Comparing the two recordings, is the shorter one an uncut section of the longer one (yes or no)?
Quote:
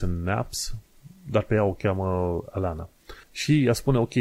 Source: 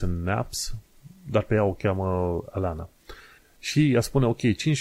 no